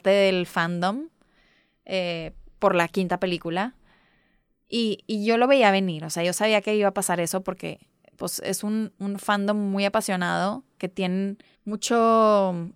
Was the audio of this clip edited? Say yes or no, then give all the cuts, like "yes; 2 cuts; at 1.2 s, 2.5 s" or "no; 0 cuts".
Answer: yes; 2 cuts; at 8.9 s, 11.5 s